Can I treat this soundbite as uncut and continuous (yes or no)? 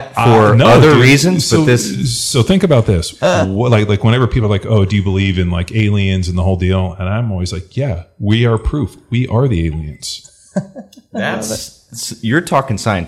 yes